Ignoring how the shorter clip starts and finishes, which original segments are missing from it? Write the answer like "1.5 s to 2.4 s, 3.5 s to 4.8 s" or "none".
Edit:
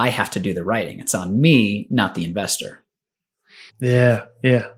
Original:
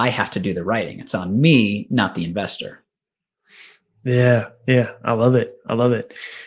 3.7 s to 3.9 s